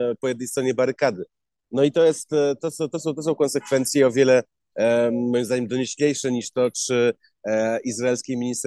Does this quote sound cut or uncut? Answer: uncut